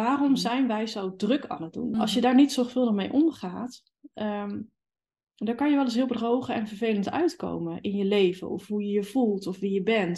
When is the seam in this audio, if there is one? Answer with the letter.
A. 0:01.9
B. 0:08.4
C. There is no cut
A